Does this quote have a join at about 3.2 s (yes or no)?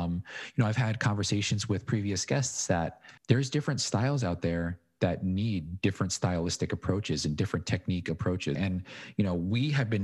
yes